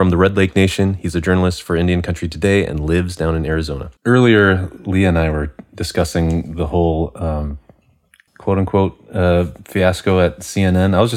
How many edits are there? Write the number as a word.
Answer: two